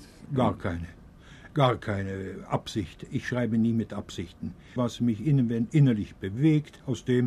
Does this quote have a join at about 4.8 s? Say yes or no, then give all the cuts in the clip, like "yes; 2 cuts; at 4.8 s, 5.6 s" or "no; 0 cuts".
yes; 1 cut; at 4.8 s